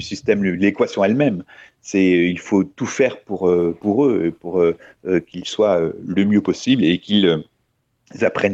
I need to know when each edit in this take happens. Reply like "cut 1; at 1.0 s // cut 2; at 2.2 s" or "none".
none